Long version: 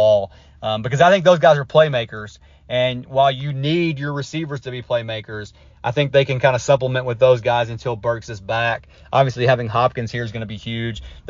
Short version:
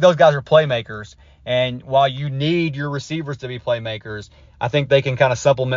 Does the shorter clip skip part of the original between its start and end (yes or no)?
no